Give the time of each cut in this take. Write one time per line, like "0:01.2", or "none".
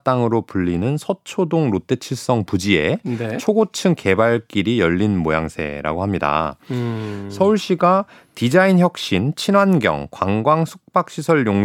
none